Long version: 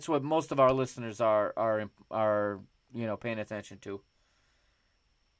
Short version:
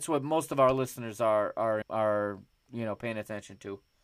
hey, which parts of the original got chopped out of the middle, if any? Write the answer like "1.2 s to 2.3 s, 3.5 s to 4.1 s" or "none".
1.8 s to 2.0 s